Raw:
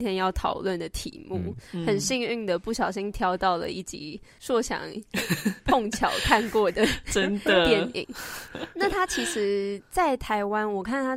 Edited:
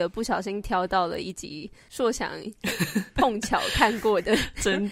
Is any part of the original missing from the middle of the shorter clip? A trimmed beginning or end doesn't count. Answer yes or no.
no